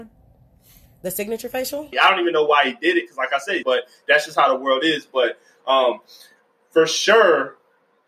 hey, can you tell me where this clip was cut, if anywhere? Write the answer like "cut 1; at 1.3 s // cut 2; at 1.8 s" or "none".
cut 1; at 1.9 s // cut 2; at 3.6 s